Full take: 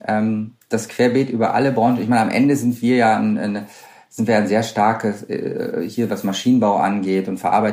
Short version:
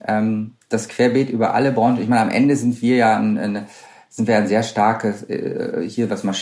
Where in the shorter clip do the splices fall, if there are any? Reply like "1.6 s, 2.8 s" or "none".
none